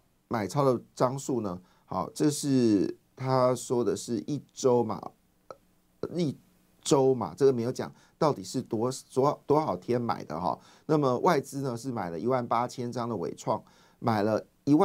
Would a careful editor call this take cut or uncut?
uncut